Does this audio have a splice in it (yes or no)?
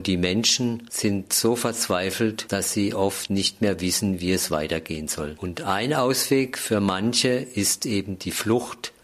no